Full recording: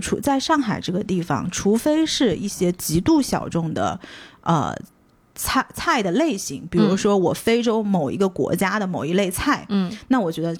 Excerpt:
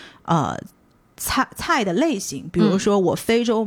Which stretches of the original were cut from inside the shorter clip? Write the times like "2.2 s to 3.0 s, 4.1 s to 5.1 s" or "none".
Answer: none